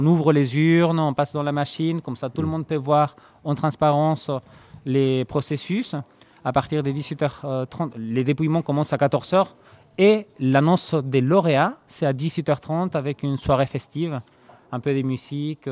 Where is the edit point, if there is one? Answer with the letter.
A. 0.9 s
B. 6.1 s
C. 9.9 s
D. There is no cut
D